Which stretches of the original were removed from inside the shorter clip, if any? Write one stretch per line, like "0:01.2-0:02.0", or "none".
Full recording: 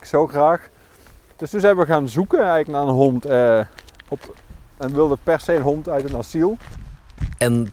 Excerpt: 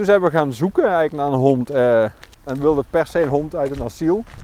0:03.9-0:04.7